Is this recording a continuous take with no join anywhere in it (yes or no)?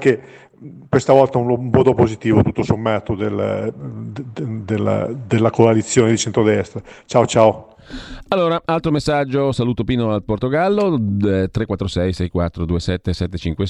yes